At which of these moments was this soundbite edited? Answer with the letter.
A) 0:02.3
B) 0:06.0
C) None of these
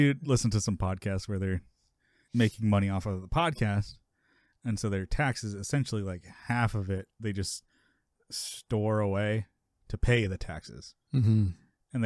A